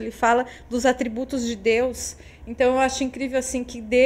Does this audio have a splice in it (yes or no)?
no